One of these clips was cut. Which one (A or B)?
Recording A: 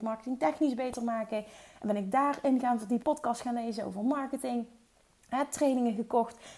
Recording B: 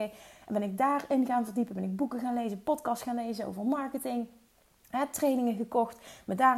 A